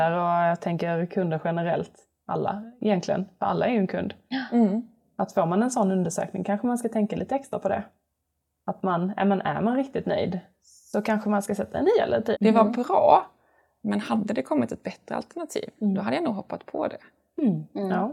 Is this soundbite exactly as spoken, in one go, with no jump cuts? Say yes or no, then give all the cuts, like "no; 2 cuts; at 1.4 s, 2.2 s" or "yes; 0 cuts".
no; 1 cut; at 12.3 s